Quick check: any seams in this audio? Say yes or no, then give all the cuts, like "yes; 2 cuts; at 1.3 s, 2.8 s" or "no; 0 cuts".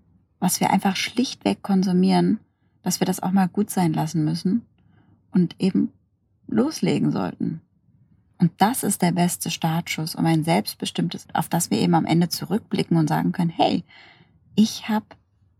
yes; 2 cuts; at 8.3 s, 11.3 s